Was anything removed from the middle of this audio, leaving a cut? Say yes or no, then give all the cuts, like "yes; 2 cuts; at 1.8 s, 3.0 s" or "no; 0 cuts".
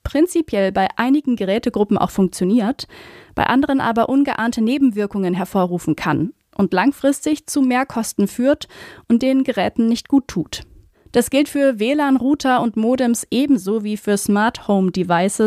no; 0 cuts